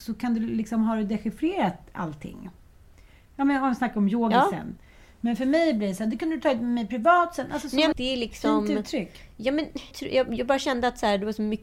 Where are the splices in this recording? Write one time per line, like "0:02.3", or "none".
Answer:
0:07.9
0:09.9